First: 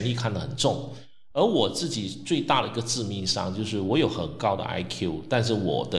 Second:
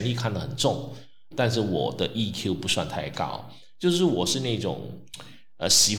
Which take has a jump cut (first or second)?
second